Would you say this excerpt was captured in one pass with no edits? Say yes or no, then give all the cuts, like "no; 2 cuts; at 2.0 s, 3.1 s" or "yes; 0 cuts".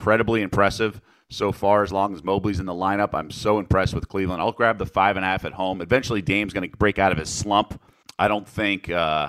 no; 1 cut; at 8.0 s